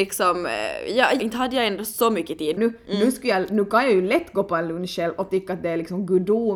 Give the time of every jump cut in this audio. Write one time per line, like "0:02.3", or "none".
0:01.2
0:02.6

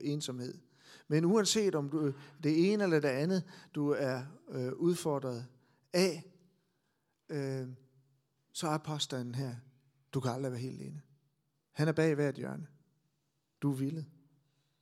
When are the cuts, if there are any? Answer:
none

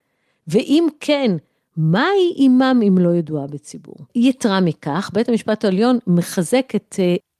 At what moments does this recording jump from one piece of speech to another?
0:04.1

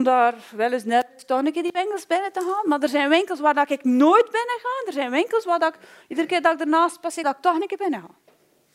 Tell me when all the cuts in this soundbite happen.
0:07.2

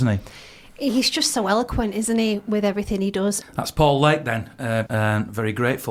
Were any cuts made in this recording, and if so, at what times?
0:03.4
0:04.9

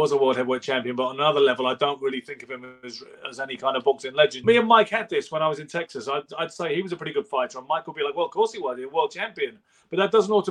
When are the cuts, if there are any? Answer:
0:04.4

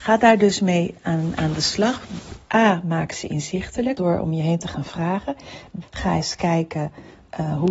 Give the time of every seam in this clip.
0:04.0
0:05.8

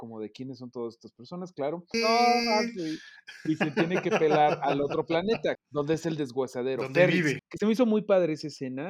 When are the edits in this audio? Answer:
0:01.9
0:05.5
0:07.4

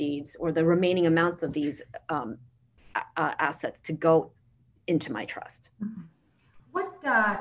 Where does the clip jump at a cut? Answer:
none

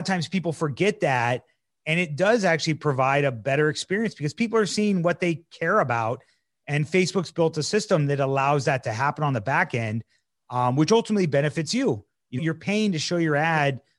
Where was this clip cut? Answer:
0:12.4

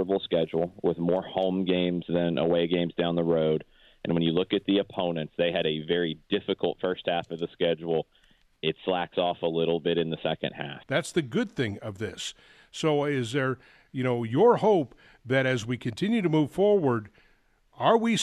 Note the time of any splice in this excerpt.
0:10.8

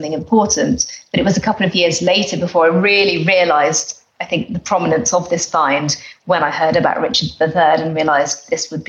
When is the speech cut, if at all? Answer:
none

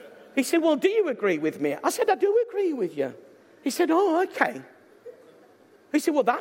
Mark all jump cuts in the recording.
none

